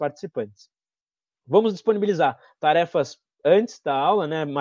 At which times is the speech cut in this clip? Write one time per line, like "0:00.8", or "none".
none